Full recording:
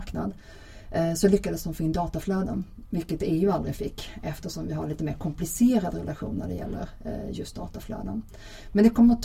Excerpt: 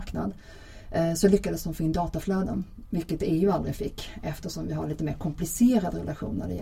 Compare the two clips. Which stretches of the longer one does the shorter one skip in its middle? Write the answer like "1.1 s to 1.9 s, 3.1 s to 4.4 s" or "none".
none